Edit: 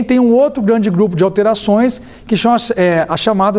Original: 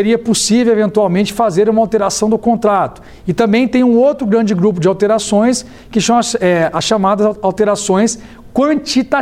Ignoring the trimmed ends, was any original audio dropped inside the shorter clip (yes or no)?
no